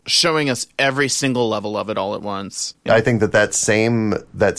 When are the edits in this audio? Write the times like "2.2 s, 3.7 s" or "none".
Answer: 2.9 s